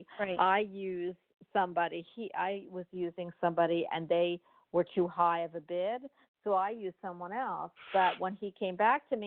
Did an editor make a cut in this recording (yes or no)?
no